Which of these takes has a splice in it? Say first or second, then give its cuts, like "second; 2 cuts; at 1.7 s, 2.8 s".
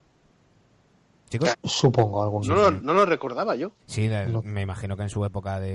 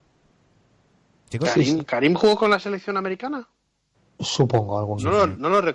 first; 2 cuts; at 1.5 s, 3.8 s